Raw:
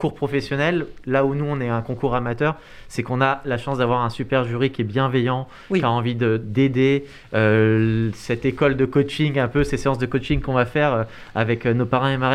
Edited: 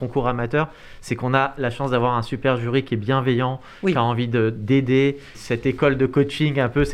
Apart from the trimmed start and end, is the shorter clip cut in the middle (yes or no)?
yes